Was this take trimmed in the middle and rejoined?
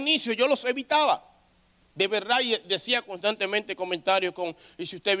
no; 0 cuts

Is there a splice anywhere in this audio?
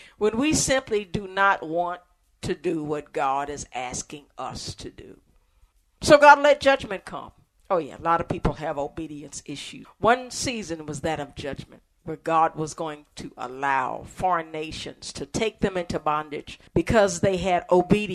yes; 3 cuts; at 7.6 s, 9.8 s, 16.7 s

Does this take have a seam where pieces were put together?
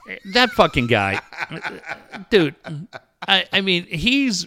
no; 0 cuts

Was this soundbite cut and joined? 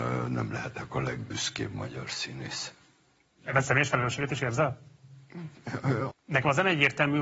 yes; 1 cut; at 6.1 s

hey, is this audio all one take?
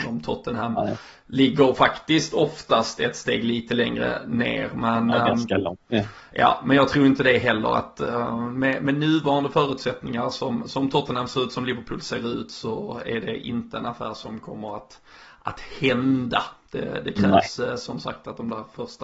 yes; 0 cuts

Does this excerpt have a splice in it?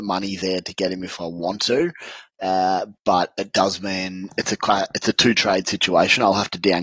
no; 0 cuts

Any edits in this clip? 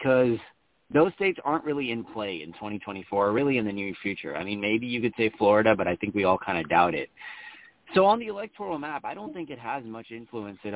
no; 0 cuts

